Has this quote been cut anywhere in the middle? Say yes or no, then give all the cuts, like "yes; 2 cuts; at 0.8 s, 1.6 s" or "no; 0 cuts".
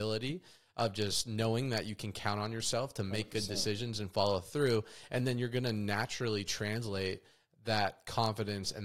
no; 0 cuts